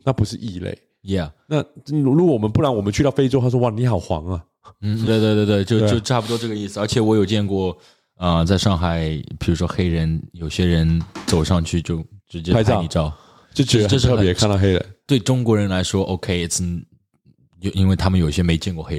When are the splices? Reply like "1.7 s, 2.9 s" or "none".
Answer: 5.1 s

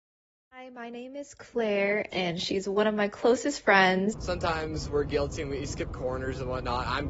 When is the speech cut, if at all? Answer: 2.1 s, 4.1 s

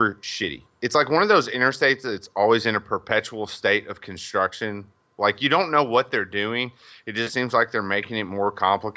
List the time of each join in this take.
none

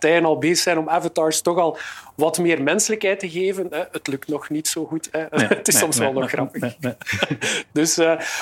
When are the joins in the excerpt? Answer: none

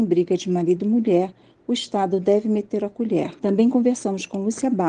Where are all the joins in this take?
none

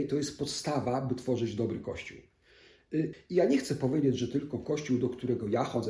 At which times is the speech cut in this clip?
3.1 s

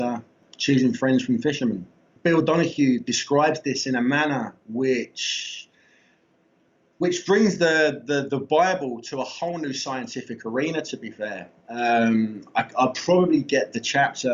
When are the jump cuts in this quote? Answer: none

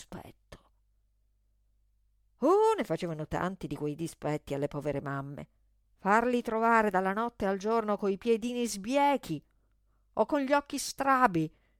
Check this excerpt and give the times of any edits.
5.8 s

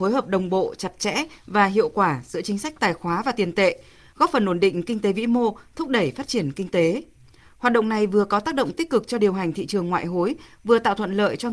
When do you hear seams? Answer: none

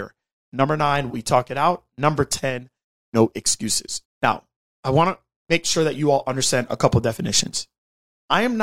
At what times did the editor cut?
1.1 s, 4.0 s

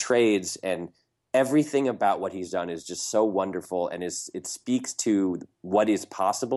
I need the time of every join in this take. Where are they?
none

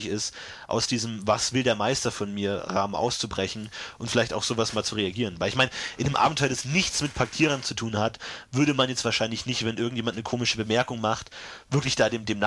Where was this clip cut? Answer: none

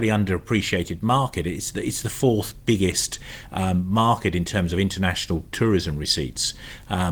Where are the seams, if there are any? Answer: none

